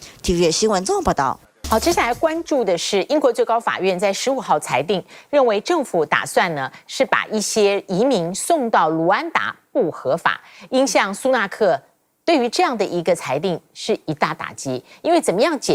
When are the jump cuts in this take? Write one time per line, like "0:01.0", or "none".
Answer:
none